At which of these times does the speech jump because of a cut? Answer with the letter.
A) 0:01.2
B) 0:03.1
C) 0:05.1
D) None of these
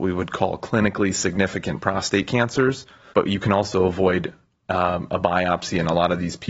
B